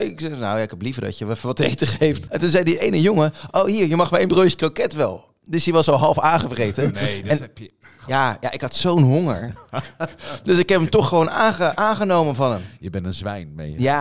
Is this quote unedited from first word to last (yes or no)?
no